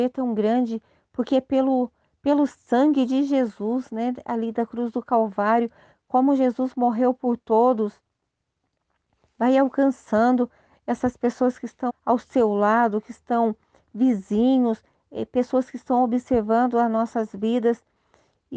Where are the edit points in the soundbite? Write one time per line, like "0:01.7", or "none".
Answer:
0:11.9